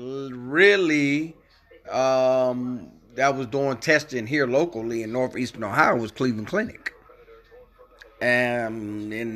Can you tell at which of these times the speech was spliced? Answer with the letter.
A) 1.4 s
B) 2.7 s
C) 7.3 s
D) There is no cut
D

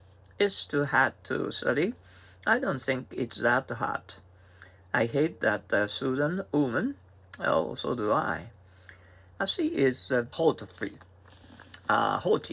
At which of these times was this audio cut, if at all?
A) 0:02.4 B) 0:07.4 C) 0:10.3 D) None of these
C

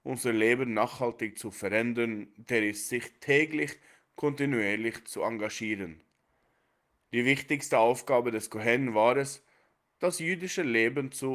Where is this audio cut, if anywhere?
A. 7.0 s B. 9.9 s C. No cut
C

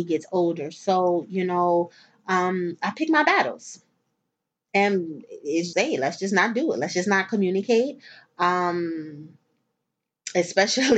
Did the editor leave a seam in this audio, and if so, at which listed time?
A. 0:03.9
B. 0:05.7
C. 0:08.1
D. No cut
B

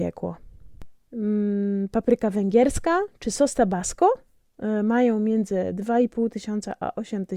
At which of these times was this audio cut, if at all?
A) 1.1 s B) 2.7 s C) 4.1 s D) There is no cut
A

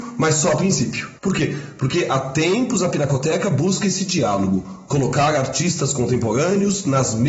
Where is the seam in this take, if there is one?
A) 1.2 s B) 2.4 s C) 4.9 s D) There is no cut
A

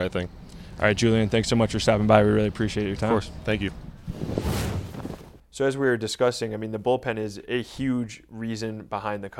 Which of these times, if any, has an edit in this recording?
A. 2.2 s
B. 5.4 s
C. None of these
C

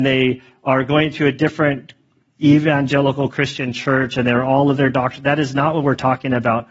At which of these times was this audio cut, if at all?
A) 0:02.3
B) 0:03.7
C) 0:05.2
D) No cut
D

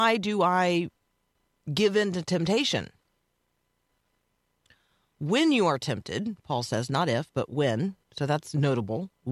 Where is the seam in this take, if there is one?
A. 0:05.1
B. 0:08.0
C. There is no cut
C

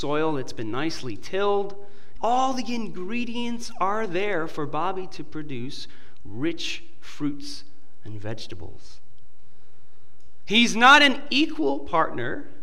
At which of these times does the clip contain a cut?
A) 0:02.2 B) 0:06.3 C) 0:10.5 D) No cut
A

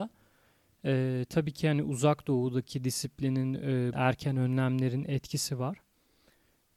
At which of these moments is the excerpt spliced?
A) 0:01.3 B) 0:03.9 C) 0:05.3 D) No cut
B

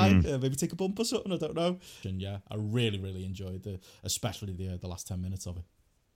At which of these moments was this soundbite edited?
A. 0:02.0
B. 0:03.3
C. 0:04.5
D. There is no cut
A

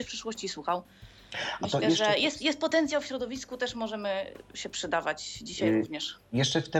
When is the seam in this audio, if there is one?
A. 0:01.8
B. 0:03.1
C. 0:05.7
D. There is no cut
D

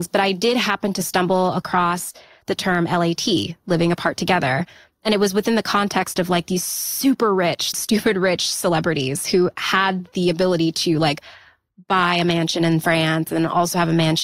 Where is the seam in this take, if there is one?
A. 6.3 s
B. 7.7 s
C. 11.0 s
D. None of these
B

